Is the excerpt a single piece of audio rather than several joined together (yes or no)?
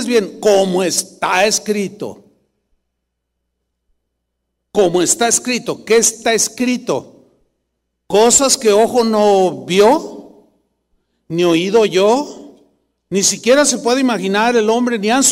yes